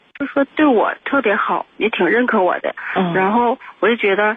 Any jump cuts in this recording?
no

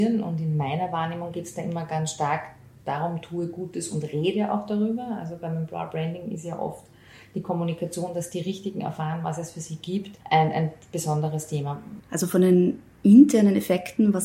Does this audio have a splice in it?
yes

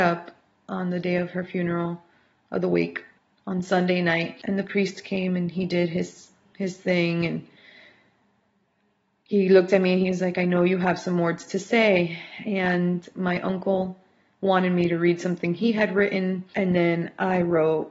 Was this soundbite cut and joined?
no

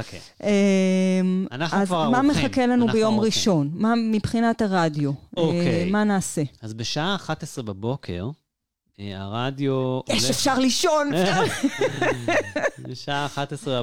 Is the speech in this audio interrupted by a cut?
no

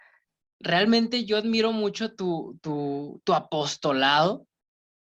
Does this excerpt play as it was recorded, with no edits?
yes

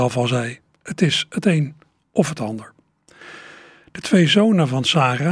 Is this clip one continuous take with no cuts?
yes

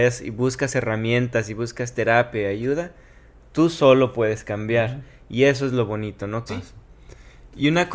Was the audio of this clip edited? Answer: yes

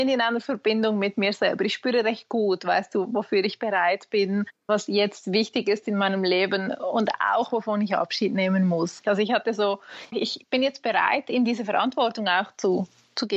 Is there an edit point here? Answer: yes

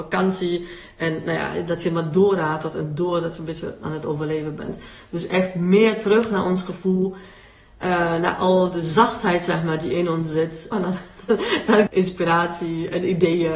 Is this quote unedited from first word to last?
no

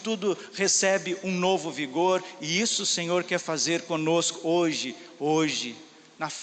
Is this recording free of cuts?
yes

